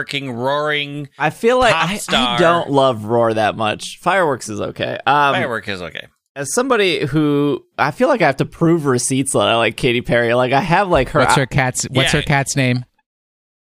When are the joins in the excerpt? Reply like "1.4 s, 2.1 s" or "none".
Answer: none